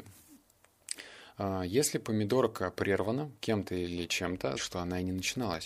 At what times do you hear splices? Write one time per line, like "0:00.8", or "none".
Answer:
0:04.5